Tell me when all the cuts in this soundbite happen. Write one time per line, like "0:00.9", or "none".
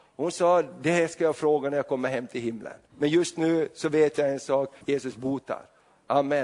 0:02.9
0:04.8